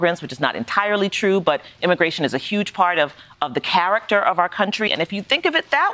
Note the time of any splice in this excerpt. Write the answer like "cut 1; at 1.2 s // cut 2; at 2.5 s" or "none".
cut 1; at 4.9 s